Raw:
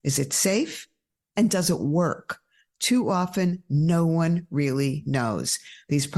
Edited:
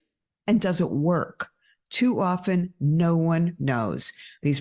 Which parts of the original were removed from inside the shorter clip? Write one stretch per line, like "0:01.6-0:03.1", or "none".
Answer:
0:04.5-0:05.0